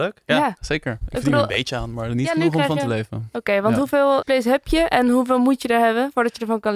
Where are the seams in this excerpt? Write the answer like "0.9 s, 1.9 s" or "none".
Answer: 4.2 s